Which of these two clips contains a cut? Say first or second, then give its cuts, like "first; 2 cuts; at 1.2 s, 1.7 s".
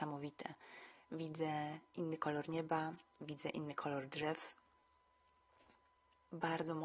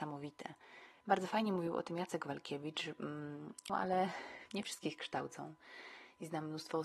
second; 2 cuts; at 1.0 s, 3.7 s